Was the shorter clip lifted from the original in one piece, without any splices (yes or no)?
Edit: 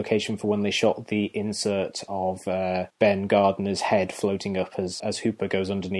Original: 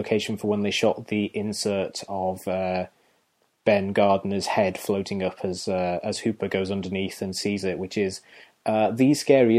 no